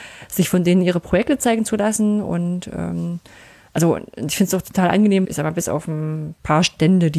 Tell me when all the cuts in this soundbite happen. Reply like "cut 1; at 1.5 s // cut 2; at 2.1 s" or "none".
cut 1; at 5.2 s